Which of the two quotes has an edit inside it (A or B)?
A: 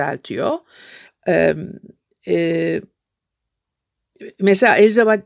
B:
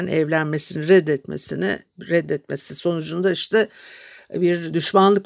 A